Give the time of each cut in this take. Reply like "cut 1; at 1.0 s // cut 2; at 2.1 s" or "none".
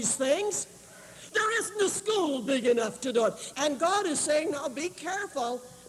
cut 1; at 1.3 s // cut 2; at 3.5 s